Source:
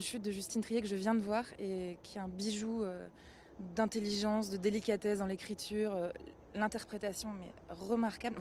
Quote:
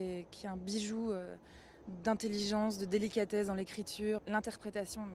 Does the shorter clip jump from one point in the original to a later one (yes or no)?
yes